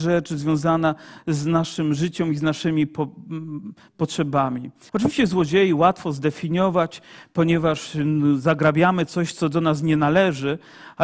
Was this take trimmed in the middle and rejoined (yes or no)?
yes